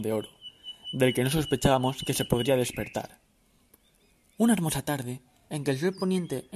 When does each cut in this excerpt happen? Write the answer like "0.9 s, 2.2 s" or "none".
5.5 s